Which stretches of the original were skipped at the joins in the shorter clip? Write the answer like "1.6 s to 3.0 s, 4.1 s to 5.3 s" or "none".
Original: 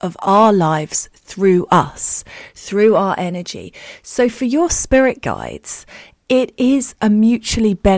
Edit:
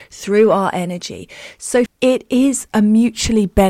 4.3 s to 6.1 s